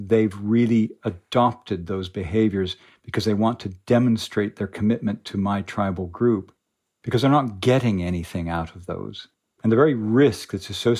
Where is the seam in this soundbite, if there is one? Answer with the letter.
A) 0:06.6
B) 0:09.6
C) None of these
B